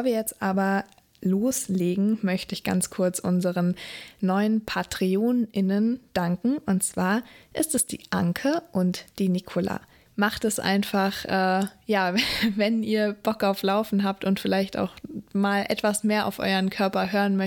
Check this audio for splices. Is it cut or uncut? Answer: cut